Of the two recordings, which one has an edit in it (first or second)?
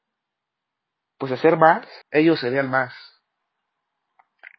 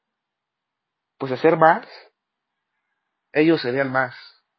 first